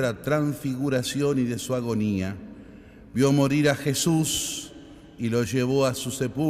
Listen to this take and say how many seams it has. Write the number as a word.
zero